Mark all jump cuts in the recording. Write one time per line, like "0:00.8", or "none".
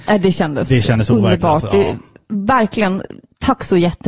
none